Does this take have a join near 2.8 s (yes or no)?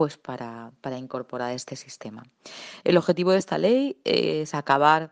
yes